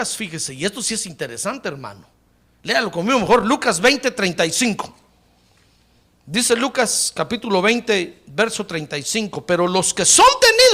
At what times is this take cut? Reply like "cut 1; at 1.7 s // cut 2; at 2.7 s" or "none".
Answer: none